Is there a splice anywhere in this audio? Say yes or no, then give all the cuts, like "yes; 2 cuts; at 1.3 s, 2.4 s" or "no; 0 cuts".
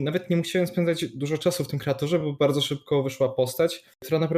no; 0 cuts